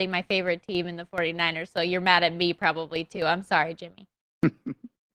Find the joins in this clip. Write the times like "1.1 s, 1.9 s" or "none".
none